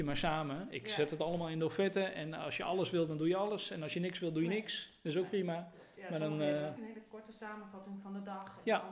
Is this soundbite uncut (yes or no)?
no